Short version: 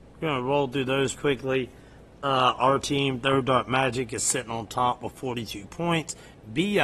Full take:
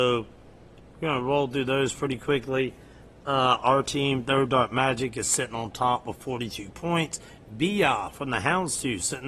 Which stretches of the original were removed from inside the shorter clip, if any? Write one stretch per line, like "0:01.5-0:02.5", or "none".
0:01.9-0:02.2